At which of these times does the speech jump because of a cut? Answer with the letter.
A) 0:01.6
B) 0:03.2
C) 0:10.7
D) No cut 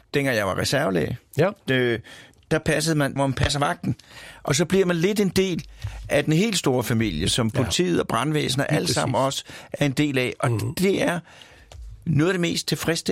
B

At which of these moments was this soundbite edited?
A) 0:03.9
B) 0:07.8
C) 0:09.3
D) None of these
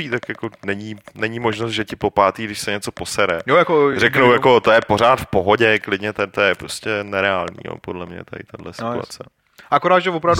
D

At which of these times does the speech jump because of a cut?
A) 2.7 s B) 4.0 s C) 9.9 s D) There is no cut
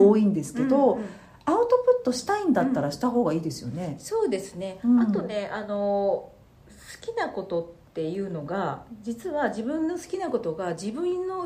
D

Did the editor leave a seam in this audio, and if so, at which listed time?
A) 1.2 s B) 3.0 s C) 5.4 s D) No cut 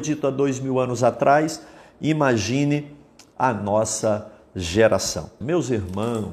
C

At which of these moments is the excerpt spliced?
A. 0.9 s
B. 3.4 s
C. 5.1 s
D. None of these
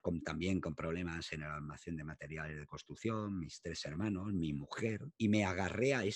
C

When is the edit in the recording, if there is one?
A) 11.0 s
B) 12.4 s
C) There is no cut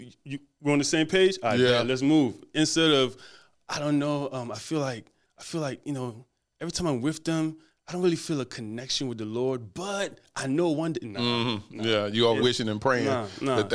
B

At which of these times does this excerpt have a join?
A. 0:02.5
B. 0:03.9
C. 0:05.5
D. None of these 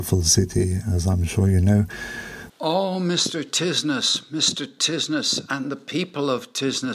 A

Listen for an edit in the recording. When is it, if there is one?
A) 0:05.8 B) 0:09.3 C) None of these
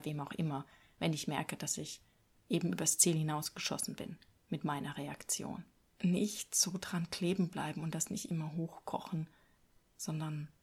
A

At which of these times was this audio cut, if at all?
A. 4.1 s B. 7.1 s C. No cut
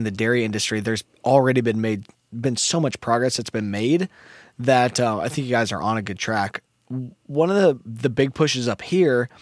C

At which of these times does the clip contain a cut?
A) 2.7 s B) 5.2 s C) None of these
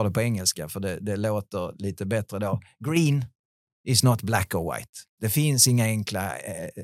B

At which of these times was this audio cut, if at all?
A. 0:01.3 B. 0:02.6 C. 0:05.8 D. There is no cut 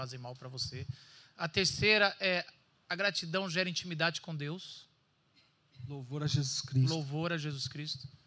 D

